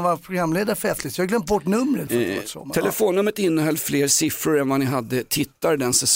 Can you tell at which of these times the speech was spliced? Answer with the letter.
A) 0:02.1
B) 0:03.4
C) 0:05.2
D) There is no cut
A